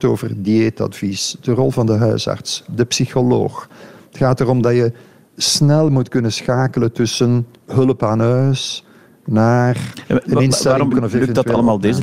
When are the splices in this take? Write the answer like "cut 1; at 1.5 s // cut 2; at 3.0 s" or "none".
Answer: cut 1; at 10.9 s